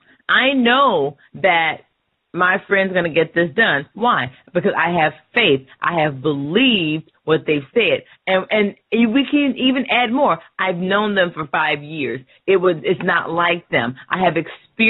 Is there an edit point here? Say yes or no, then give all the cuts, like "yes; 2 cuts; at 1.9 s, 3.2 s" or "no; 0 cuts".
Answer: no; 0 cuts